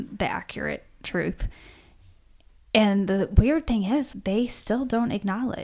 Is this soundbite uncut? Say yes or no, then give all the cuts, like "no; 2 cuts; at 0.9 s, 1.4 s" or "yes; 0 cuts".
no; 1 cut; at 4.1 s